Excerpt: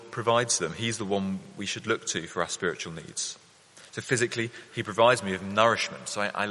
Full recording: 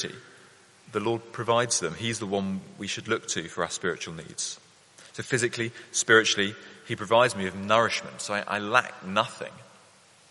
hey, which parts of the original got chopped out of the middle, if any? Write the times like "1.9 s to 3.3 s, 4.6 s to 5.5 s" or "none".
5.9 s to 6.8 s